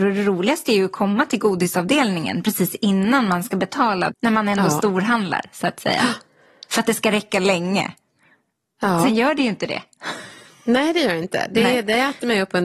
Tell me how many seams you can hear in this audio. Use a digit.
1